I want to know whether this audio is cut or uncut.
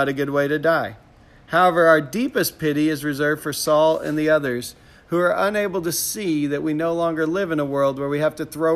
uncut